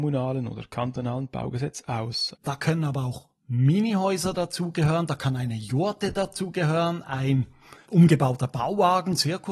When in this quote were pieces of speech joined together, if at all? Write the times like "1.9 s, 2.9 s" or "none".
2.3 s, 7.9 s